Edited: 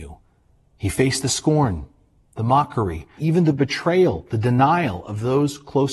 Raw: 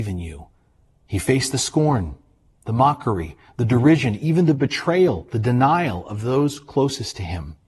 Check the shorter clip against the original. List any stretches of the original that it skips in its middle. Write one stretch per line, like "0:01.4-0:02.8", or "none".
0:03.5-0:04.2